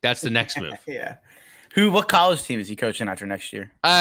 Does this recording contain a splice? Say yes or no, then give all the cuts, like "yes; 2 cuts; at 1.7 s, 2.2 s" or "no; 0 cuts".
no; 0 cuts